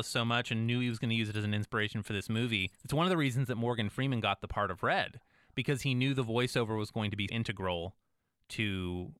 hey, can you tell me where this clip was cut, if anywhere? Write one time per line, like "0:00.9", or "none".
0:02.8
0:07.3

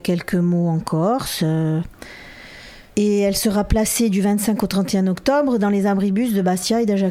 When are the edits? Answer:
0:02.9

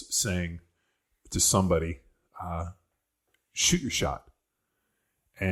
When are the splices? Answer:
none

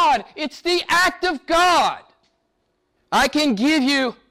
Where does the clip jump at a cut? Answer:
0:03.0

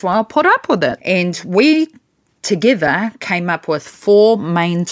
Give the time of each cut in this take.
0:01.0

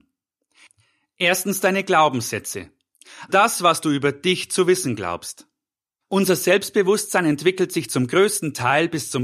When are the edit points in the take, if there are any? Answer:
0:03.3
0:06.0

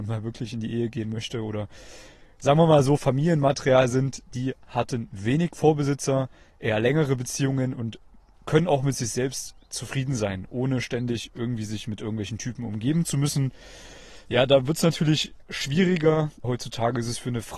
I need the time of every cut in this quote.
0:16.4

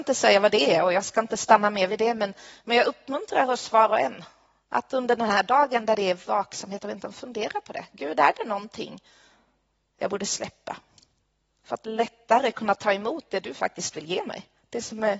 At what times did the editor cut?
none

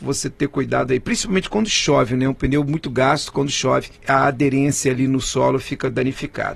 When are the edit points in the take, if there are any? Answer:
0:04.0

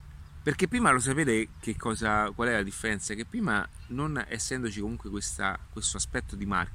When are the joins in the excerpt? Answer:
none

